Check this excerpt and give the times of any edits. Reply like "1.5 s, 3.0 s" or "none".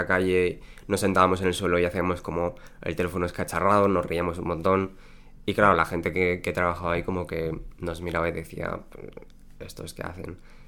none